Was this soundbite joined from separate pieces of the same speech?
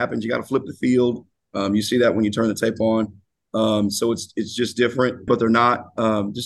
yes; 2 cuts; at 1.5 s, 5.3 s

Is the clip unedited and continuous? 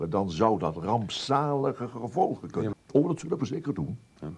no; 1 cut; at 2.7 s

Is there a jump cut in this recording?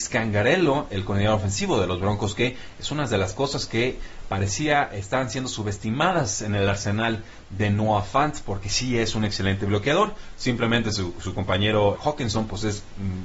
yes; 1 cut; at 12.0 s

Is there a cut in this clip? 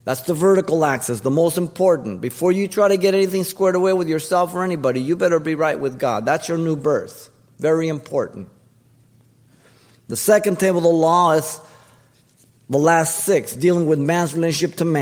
no; 0 cuts

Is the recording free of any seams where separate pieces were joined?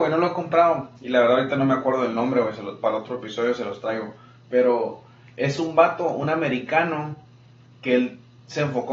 no; 1 cut; at 1.0 s

